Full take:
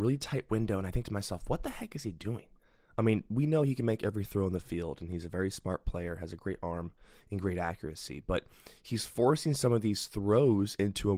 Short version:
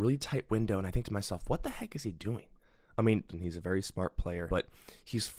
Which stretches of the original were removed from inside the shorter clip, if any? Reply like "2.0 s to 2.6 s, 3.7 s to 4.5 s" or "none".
3.3 s to 5.0 s, 6.2 s to 8.3 s